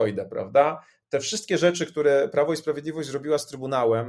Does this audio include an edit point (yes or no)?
no